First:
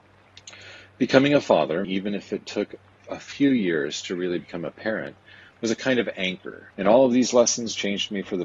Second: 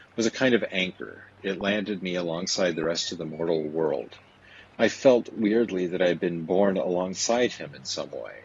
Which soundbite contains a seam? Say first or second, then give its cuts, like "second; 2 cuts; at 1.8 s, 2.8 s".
first; 2 cuts; at 1.8 s, 6.7 s